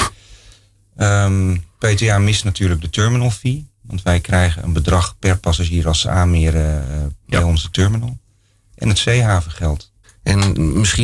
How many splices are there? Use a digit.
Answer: 1